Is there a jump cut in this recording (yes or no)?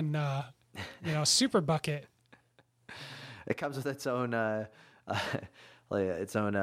no